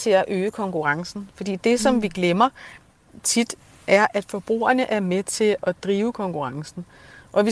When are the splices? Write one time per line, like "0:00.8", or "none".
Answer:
none